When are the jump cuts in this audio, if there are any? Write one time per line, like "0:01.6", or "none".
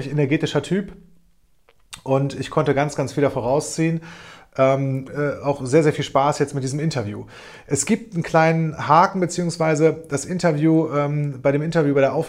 0:05.1